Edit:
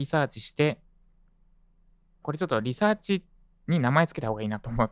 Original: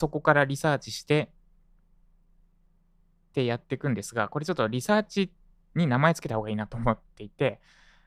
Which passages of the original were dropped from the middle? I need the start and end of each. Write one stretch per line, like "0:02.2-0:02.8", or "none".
0:02.7-0:04.3